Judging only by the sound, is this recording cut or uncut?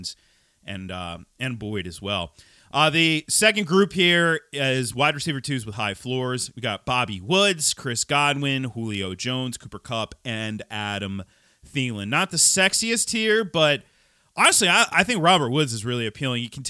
uncut